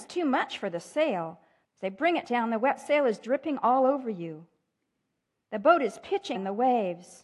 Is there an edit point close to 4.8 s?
no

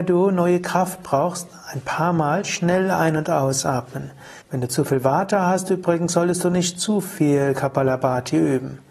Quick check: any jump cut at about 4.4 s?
yes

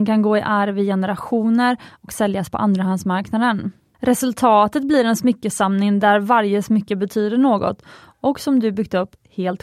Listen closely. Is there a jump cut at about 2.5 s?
no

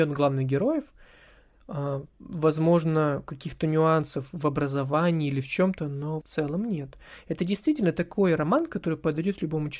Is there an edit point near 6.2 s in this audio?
yes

